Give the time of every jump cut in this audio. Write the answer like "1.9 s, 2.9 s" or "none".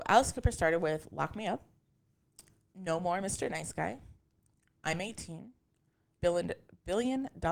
6.2 s